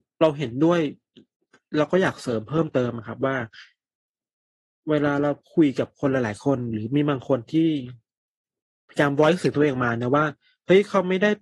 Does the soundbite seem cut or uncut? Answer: uncut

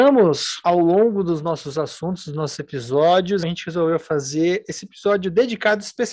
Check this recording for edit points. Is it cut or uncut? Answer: cut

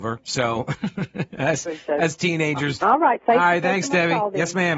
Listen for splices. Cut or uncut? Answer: cut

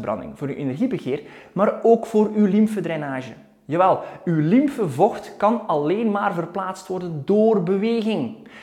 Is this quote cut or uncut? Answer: uncut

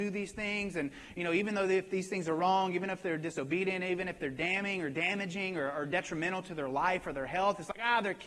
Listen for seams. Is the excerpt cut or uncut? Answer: uncut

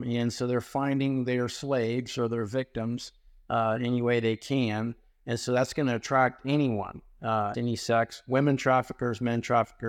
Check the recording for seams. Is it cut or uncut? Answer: cut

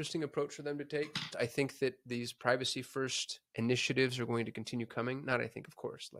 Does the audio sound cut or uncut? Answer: cut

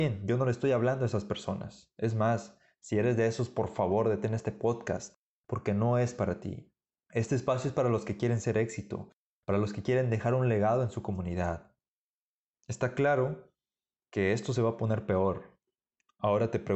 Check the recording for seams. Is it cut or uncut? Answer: uncut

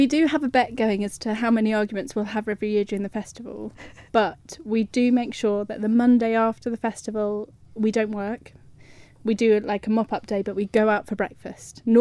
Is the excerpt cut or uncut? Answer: uncut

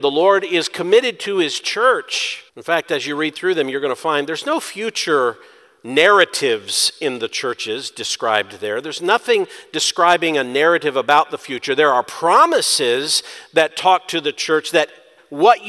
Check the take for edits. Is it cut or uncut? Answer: cut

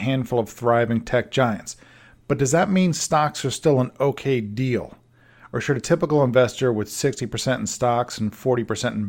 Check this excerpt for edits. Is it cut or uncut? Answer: uncut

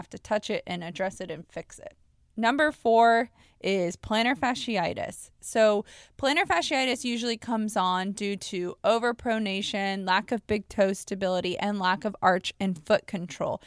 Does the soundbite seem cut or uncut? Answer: uncut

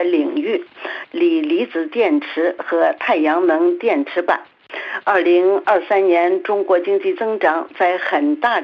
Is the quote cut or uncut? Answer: cut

